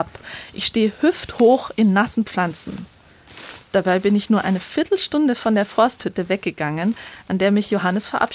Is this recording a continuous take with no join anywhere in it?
yes; 0 cuts

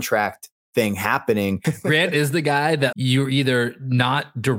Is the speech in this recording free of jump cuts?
no; 2 cuts; at 1.6 s, 2.9 s

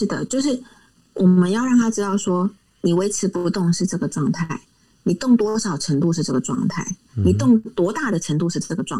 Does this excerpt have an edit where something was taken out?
no; 0 cuts

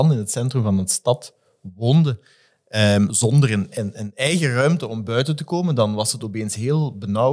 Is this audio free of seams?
yes; 0 cuts

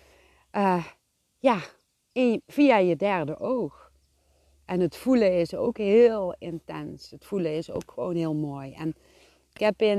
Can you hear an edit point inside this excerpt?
no; 0 cuts

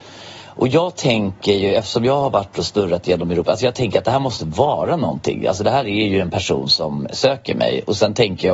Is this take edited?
no; 0 cuts

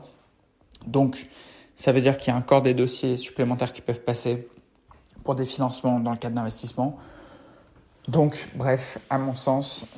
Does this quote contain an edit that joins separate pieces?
no; 0 cuts

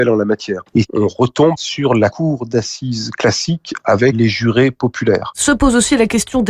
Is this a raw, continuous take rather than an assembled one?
yes; 0 cuts

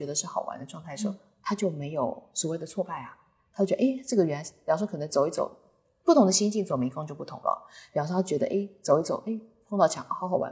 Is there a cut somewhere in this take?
no; 0 cuts

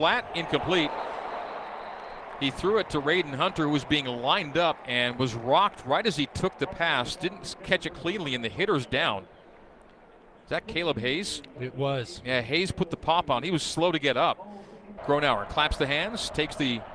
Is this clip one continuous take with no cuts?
no; 1 cut; at 15.0 s

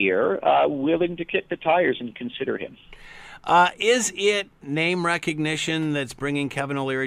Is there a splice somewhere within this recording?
no; 0 cuts

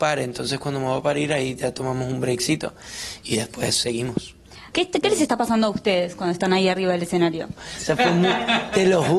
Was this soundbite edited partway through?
yes; 2 cuts; at 4.7 s, 7.6 s

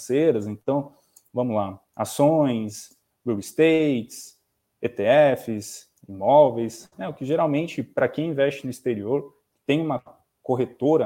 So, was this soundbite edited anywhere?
no; 0 cuts

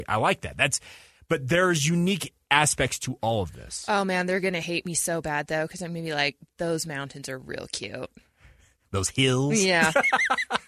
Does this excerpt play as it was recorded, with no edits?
yes; 0 cuts

